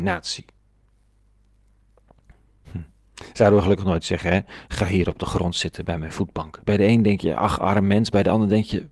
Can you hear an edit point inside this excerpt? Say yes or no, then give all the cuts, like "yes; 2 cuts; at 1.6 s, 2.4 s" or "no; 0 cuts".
yes; 1 cut; at 6.6 s